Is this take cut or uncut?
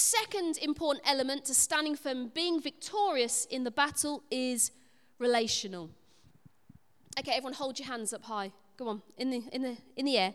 uncut